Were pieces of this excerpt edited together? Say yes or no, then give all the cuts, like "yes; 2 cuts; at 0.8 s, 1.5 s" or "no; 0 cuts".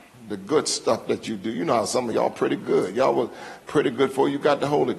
yes; 1 cut; at 2.1 s